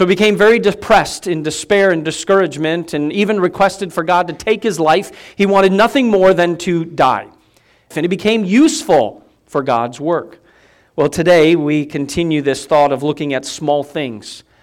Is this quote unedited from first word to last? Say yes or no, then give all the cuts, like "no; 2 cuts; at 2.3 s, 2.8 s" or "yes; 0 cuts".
no; 1 cut; at 7.9 s